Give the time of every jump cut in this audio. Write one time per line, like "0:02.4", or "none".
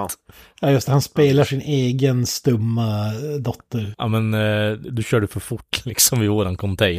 0:03.9